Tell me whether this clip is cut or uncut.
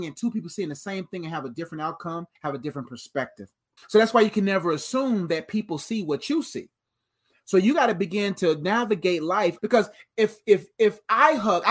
cut